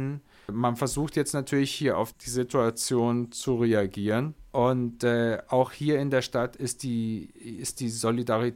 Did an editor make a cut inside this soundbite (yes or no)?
yes